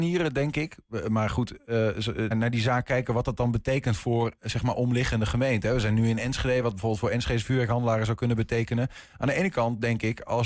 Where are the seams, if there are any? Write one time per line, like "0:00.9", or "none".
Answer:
0:02.3

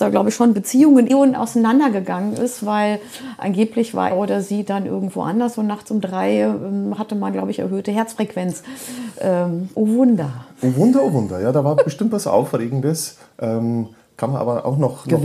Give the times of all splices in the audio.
0:01.1
0:04.1
0:09.7

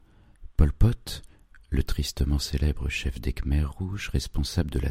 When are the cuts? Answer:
none

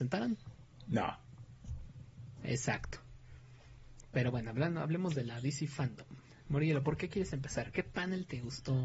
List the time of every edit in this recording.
none

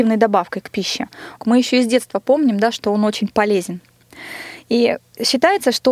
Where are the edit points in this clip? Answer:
0:01.4

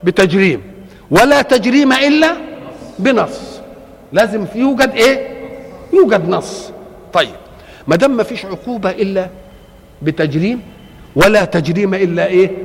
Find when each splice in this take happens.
none

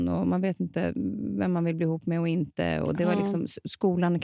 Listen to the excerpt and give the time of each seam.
none

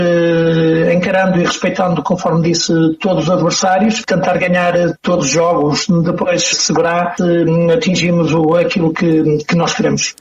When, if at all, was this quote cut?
none

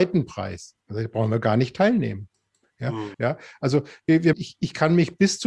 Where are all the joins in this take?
0:03.1
0:04.3

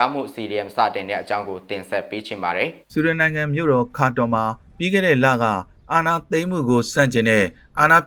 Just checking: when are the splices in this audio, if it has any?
0:02.8

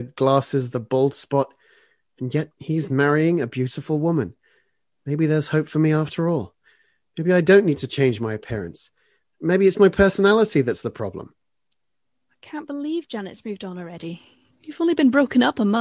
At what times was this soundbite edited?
0:09.7

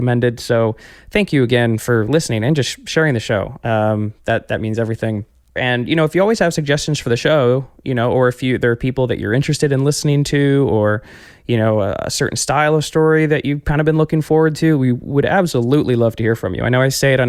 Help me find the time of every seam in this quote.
0:05.6

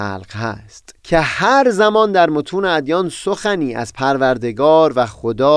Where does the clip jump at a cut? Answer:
0:01.0

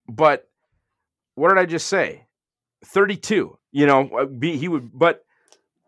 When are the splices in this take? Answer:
0:03.6

